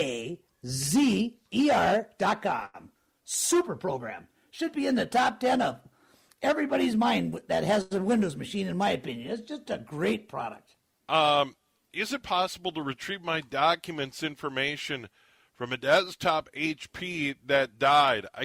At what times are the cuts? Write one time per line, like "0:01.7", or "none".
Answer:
0:11.0